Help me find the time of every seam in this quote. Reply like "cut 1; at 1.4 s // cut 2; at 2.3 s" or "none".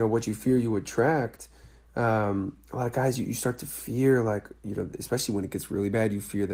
none